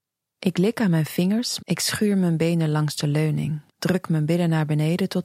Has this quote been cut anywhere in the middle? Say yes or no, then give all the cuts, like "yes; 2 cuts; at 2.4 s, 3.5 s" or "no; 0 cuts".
yes; 2 cuts; at 1.6 s, 3.7 s